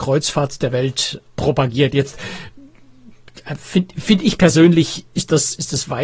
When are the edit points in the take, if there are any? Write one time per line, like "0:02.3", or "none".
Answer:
0:01.2